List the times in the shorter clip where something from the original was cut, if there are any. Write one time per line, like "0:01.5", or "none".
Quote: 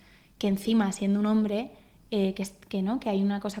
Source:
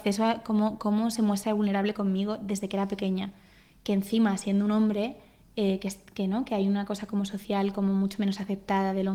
none